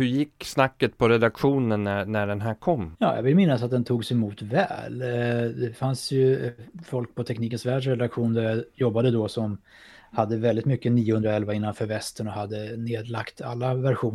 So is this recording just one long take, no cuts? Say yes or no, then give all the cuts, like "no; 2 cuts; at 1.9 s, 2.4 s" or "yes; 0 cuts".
no; 1 cut; at 2.9 s